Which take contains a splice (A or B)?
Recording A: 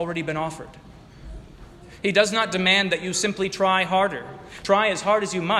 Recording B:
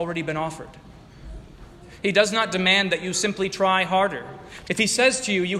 B